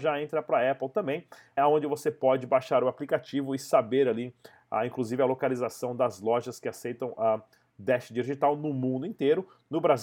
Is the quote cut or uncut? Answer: cut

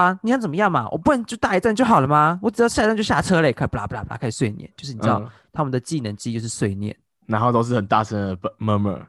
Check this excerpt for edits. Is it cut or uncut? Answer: uncut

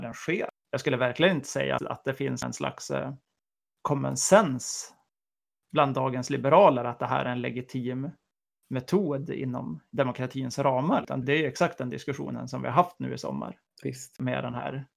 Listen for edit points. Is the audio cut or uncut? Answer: cut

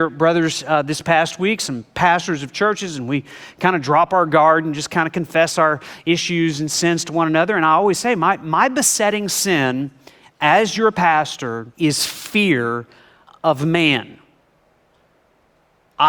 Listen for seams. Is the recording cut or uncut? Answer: cut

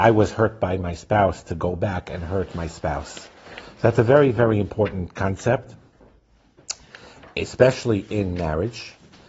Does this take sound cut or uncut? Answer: uncut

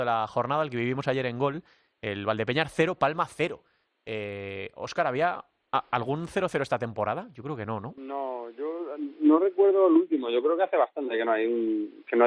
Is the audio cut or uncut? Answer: uncut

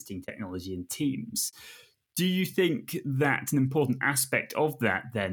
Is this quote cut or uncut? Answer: uncut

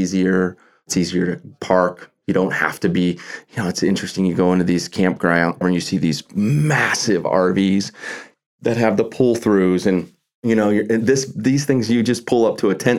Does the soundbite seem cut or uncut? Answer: cut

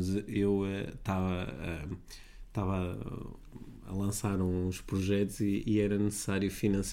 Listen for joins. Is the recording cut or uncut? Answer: uncut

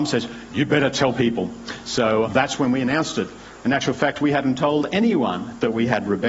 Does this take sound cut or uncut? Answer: cut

